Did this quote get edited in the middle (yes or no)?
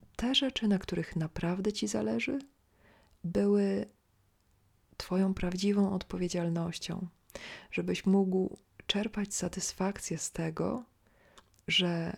no